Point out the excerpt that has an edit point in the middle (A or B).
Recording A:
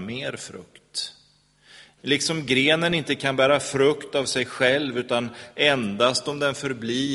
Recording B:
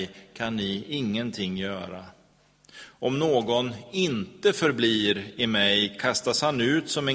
A